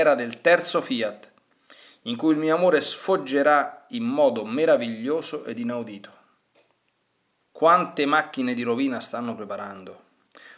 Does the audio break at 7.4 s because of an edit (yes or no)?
yes